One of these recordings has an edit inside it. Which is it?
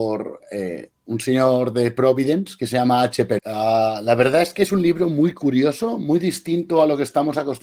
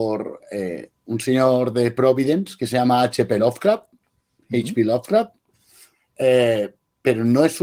first; 1 cut; at 3.4 s

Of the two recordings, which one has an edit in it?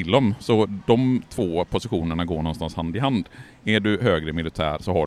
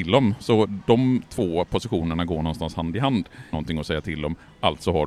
second; 1 cut; at 3.5 s

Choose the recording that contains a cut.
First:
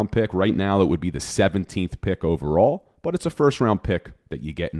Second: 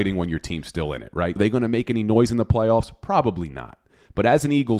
second; 1 cut; at 1.4 s

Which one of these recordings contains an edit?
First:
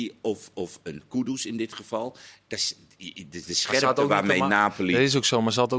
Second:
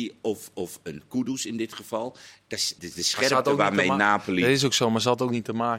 second; 1 cut; at 2.8 s

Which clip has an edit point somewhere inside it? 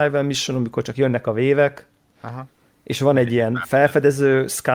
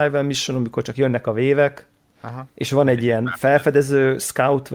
second; 1 cut; at 2.5 s

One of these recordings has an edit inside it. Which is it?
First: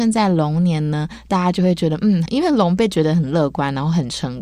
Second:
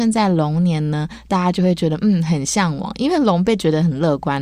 first; 1 cut; at 2.3 s

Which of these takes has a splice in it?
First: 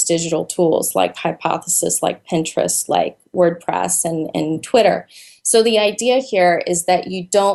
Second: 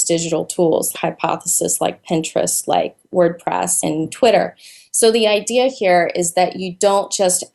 second; 2 cuts; at 0.9 s, 3.8 s

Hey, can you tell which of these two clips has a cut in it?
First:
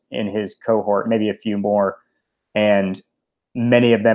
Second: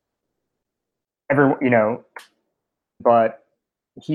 second; 1 cut; at 3.0 s

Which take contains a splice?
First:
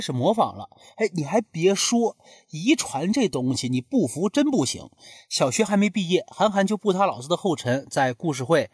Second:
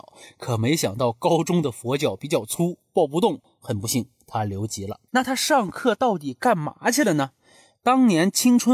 second; 1 cut; at 5.1 s

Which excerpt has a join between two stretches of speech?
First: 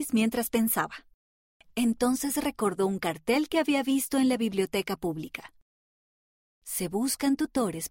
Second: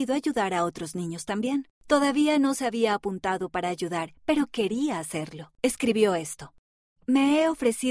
second; 2 cuts; at 1.8 s, 5.6 s

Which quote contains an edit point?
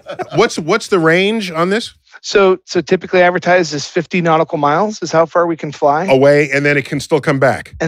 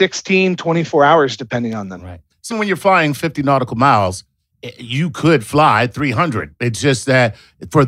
second; 1 cut; at 2.5 s

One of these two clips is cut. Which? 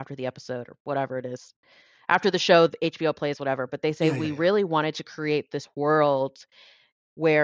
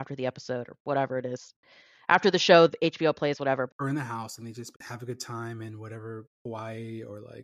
second; 2 cuts; at 3.7 s, 4.7 s

